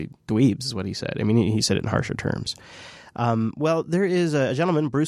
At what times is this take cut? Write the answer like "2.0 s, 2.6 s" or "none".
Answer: none